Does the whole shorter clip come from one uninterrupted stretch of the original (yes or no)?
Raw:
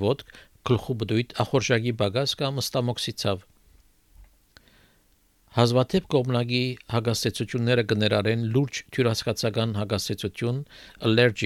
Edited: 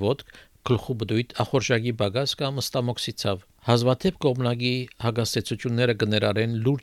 no